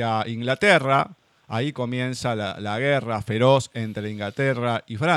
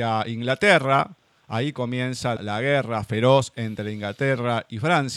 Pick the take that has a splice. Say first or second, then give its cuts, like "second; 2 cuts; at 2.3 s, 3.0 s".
second; 1 cut; at 2.4 s